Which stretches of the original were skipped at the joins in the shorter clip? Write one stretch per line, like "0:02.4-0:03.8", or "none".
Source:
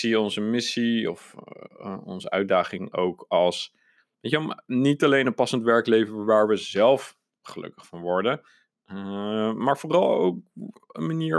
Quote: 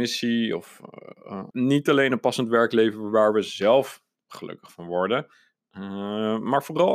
0:02.0-0:04.6